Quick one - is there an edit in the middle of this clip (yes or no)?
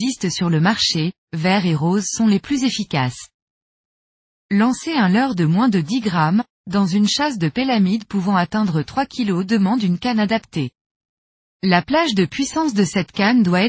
yes